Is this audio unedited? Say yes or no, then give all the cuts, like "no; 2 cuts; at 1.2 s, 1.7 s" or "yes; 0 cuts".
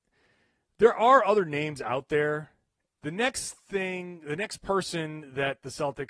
no; 1 cut; at 2.9 s